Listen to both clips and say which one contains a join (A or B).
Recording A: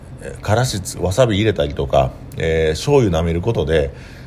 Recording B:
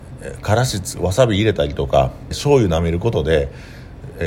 B